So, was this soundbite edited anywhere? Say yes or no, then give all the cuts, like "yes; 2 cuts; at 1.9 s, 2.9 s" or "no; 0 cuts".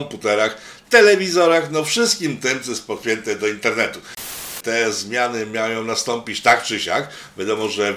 yes; 1 cut; at 4.6 s